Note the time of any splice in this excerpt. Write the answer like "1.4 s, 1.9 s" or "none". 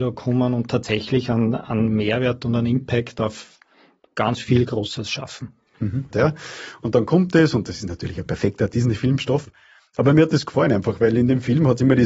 6.1 s